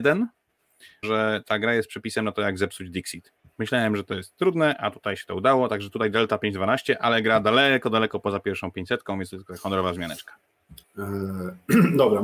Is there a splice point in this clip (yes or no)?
yes